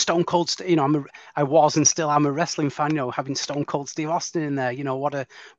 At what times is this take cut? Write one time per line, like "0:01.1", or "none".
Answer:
none